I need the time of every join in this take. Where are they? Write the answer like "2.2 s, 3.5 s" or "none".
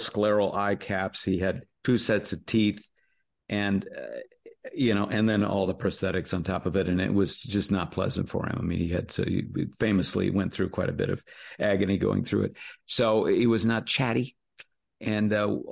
none